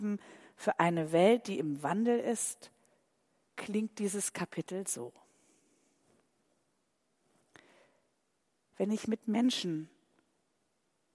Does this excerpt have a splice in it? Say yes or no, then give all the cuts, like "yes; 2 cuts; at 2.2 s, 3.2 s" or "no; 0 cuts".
no; 0 cuts